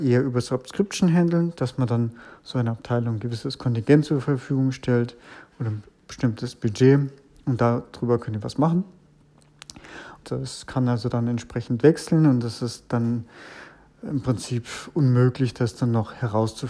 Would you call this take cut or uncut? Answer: cut